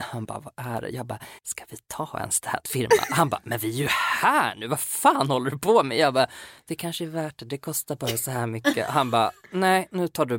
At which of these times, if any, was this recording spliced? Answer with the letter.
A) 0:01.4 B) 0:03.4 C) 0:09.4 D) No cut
A